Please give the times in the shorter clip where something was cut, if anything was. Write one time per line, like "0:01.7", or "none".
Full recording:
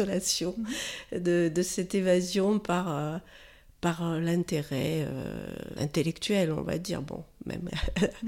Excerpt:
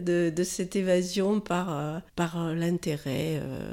0:02.1